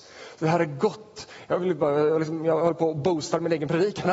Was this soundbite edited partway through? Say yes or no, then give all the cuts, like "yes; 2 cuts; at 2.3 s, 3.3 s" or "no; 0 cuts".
no; 0 cuts